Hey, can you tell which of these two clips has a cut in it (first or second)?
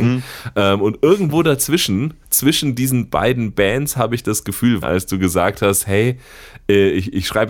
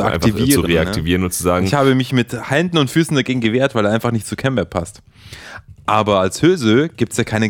first